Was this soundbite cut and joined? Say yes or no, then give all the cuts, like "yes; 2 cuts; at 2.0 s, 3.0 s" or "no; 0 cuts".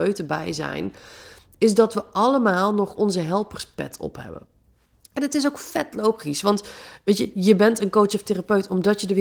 no; 0 cuts